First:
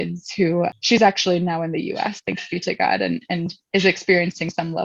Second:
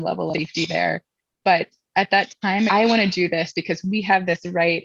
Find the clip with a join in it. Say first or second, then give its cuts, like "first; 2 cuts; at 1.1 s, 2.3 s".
second; 1 cut; at 2.7 s